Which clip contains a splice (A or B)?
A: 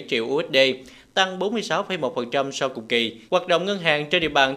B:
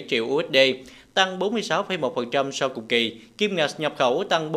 A